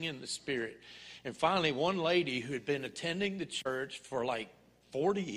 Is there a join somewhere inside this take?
no; 0 cuts

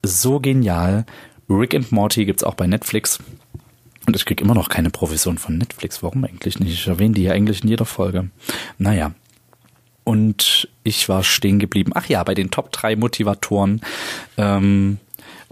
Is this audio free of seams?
yes; 0 cuts

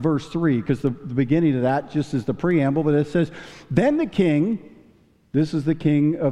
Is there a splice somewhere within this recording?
no; 0 cuts

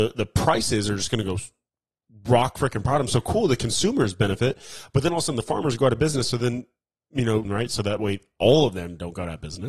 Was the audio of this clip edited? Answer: yes; 1 cut; at 7.5 s

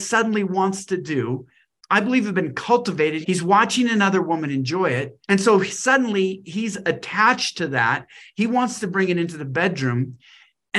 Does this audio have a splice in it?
yes; 2 cuts; at 3.2 s, 5.2 s

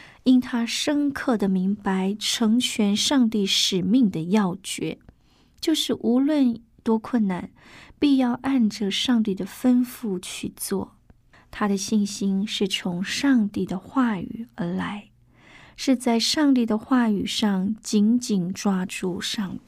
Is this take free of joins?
no; 1 cut; at 11.3 s

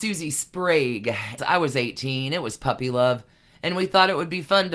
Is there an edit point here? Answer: yes; 1 cut; at 1.4 s

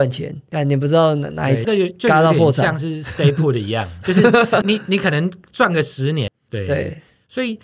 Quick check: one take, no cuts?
no; 3 cuts; at 1.6 s, 4.6 s, 6.3 s

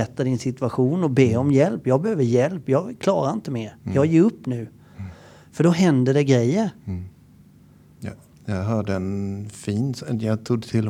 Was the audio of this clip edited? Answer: no; 0 cuts

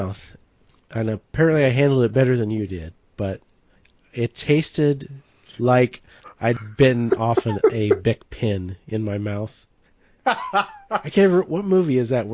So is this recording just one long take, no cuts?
yes; 0 cuts

